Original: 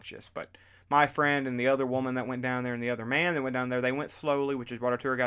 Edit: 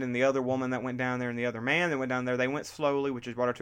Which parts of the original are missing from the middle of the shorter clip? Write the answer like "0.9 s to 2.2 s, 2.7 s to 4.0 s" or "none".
none